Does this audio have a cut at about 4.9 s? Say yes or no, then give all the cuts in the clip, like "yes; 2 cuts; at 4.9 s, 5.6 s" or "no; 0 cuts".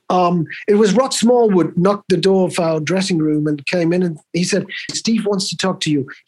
yes; 1 cut; at 4.9 s